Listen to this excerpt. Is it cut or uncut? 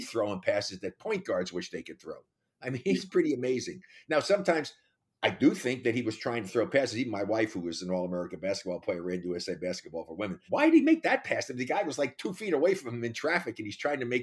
cut